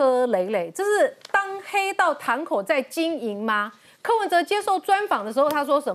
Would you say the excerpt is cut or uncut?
uncut